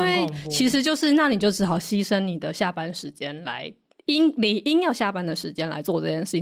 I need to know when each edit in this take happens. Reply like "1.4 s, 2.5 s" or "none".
none

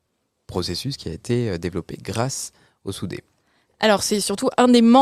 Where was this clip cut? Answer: none

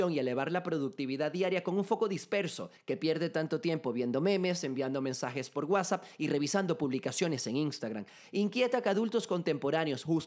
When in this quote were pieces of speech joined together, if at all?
none

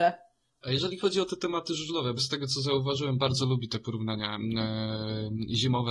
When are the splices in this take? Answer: 2.2 s

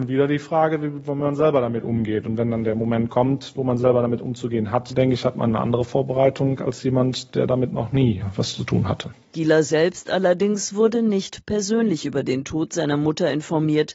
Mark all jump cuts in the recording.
none

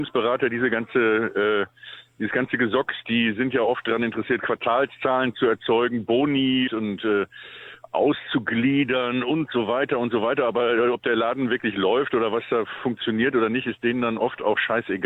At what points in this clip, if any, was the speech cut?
6.7 s

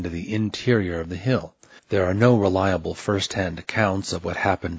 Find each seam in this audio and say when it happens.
1.8 s

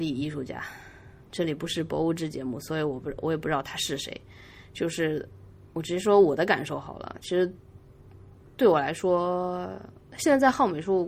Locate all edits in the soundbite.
none

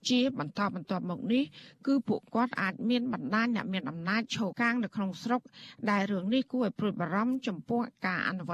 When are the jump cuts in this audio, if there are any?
4.5 s

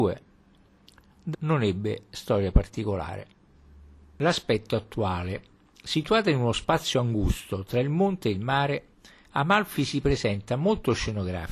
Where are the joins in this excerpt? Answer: 1.3 s

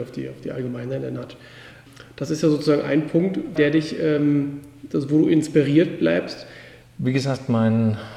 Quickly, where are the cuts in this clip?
3.6 s, 6.8 s

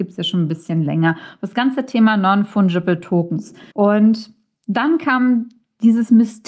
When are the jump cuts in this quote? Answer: 3.7 s

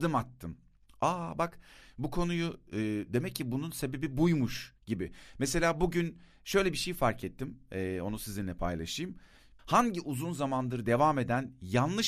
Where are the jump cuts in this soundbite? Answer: 9.6 s

